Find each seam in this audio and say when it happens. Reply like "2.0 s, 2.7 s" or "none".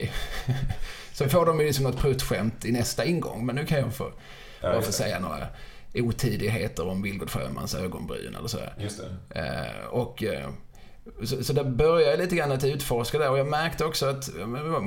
none